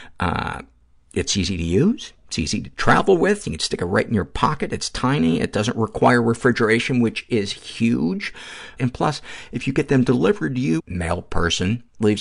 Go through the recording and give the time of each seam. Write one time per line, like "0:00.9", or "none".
0:08.8
0:10.8